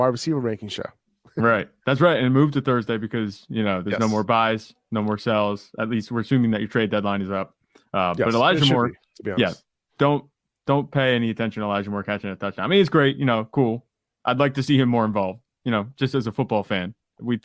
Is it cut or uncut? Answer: uncut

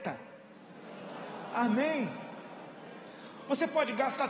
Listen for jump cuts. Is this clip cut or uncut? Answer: uncut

